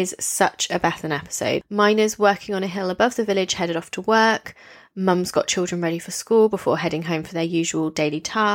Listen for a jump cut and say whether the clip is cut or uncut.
cut